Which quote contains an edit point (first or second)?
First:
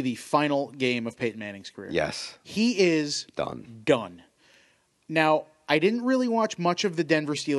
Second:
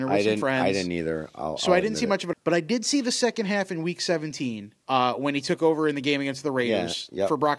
second